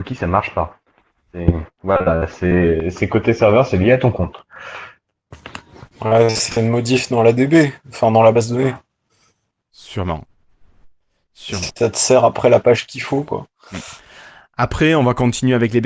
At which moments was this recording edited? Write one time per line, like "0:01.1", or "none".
none